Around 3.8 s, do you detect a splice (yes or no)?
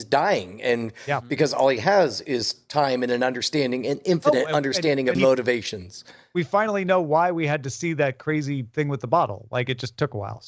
no